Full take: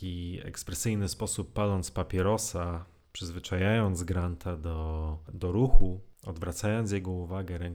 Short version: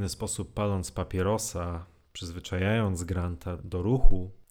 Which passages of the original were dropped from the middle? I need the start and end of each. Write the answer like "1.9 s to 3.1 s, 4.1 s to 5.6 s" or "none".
4.6 s to 5.3 s